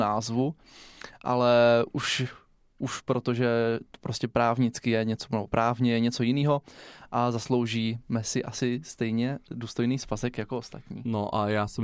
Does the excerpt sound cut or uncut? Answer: uncut